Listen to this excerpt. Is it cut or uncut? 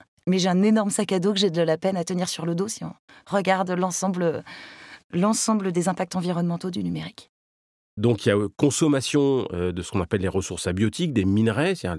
uncut